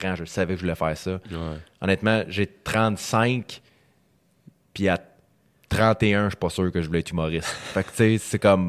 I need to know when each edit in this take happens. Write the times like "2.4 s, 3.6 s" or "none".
none